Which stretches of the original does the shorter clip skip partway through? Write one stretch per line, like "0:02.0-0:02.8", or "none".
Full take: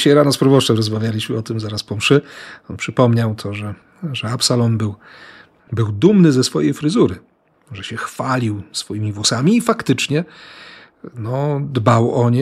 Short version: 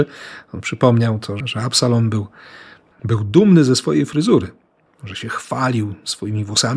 0:03.6-0:04.1